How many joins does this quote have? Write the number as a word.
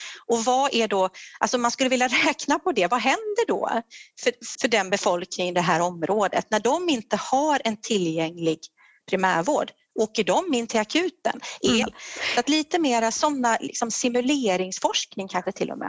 two